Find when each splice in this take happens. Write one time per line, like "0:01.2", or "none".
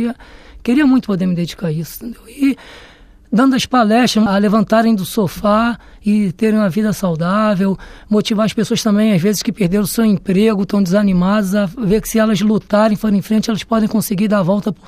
0:04.3